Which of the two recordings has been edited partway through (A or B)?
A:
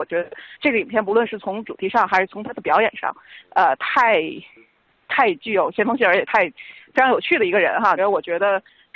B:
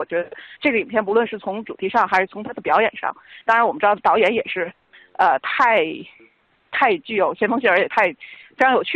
A